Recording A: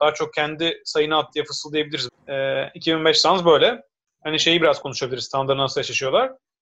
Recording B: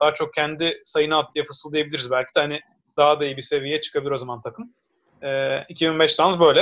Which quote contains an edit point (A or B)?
A